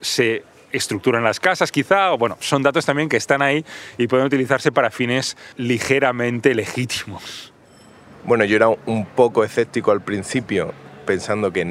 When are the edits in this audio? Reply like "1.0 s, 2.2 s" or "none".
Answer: 5.5 s